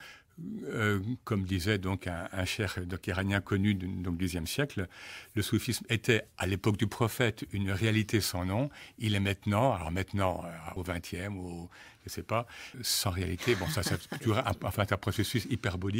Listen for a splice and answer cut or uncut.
cut